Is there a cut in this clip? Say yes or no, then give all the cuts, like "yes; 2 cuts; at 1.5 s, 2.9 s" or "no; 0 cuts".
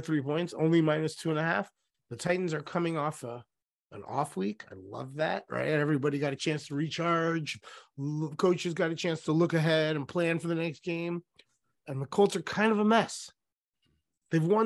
no; 0 cuts